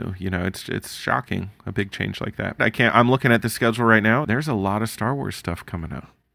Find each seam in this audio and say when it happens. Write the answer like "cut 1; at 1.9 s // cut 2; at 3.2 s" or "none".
cut 1; at 2.6 s // cut 2; at 4.2 s